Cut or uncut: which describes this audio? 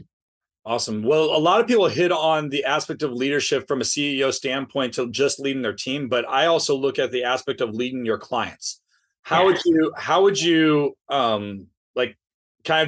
uncut